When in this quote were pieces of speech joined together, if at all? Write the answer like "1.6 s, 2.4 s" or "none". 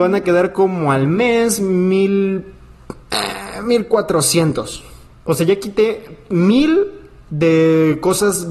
none